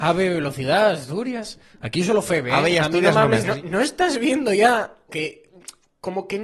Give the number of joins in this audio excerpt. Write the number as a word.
two